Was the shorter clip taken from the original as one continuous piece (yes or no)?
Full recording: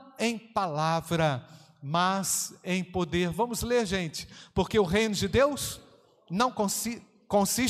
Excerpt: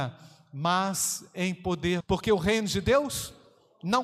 no